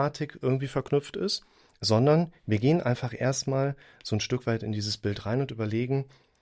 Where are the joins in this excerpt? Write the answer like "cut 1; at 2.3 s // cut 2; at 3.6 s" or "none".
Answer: none